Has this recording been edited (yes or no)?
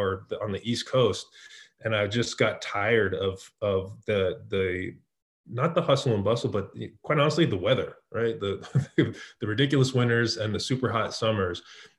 no